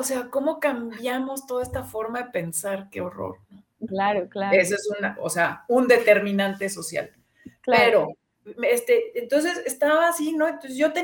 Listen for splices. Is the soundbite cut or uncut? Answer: cut